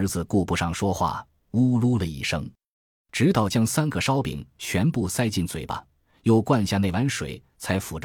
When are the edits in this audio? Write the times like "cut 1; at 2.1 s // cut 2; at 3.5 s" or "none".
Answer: none